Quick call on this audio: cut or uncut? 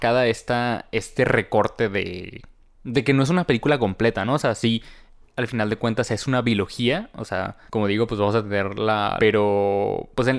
cut